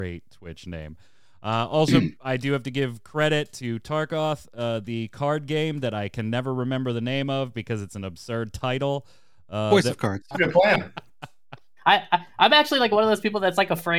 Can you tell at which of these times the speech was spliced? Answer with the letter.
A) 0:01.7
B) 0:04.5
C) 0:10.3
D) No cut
C